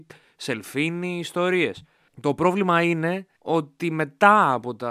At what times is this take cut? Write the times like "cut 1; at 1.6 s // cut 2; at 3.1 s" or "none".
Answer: cut 1; at 2.1 s // cut 2; at 3.4 s

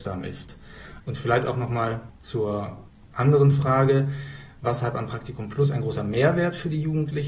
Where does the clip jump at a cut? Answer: cut 1; at 1.0 s

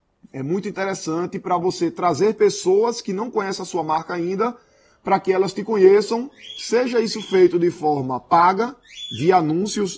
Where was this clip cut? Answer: none

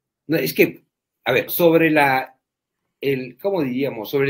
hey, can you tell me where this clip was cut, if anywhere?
cut 1; at 1.5 s

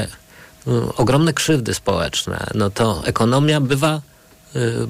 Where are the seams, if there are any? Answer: none

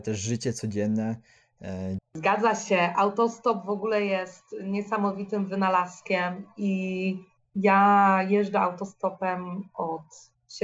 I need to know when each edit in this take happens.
cut 1; at 2.0 s // cut 2; at 7.5 s

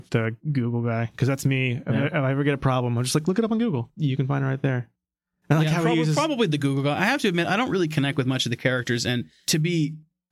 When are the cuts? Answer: none

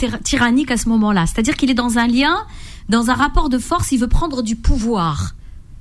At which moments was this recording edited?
none

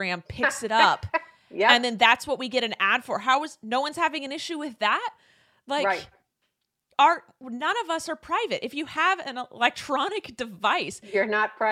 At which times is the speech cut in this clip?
none

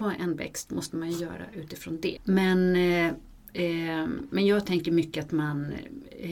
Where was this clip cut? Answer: cut 1; at 2.2 s

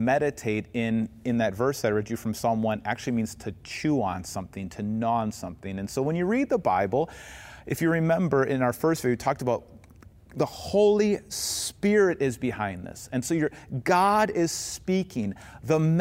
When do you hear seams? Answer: none

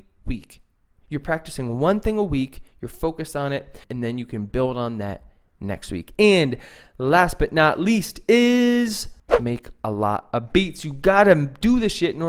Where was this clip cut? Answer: cut 1; at 3.8 s

